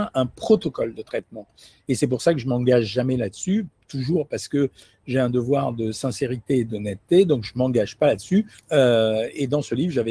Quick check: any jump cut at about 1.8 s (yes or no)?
no